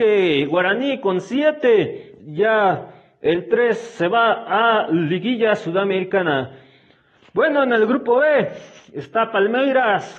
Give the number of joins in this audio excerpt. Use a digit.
1